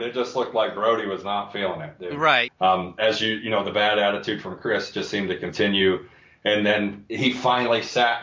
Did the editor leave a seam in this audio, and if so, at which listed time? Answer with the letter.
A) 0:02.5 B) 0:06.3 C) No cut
A